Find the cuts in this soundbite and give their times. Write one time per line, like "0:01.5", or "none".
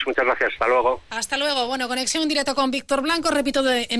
none